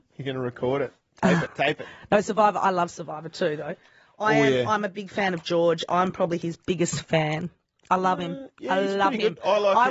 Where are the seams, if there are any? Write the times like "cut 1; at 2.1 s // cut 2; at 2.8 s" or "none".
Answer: cut 1; at 1.5 s

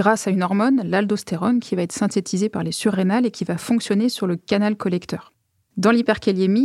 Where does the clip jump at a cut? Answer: cut 1; at 5.7 s

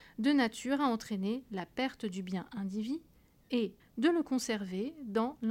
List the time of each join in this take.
cut 1; at 3.8 s

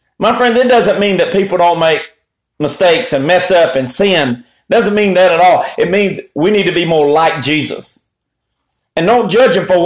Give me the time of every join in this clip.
none

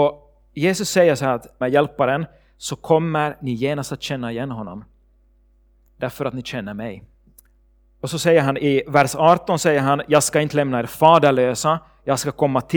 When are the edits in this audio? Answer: cut 1; at 1.6 s

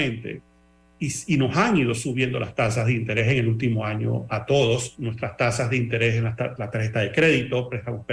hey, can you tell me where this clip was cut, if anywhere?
none

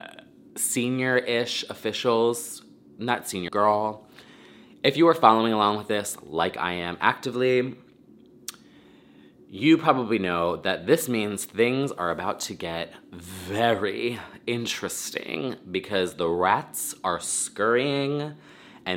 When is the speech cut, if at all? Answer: cut 1; at 3.5 s

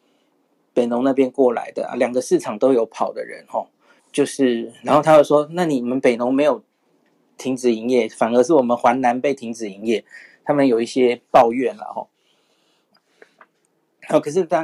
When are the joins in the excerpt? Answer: cut 1; at 4.0 s // cut 2; at 12.9 s

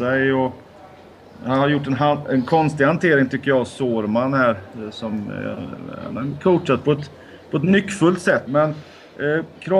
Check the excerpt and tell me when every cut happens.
cut 1; at 8.5 s

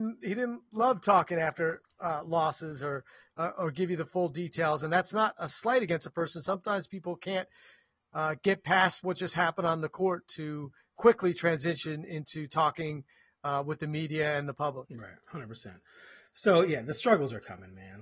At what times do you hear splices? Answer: none

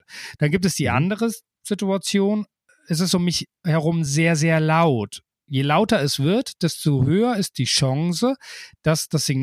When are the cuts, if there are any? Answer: none

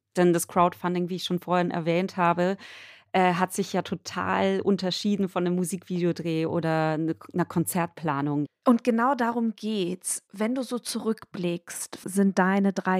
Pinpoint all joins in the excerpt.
cut 1; at 8.5 s // cut 2; at 12.0 s

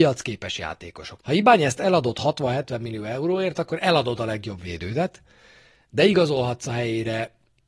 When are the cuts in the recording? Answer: cut 1; at 1.2 s

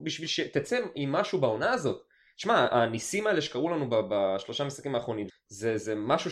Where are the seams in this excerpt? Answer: cut 1; at 5.3 s

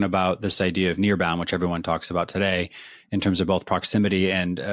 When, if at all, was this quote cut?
none

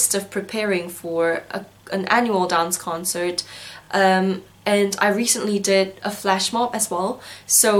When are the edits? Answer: none

